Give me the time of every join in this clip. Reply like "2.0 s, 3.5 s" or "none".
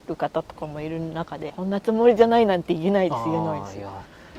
1.5 s